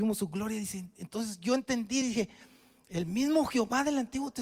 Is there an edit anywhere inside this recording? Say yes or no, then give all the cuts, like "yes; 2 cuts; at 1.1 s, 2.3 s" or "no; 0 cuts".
no; 0 cuts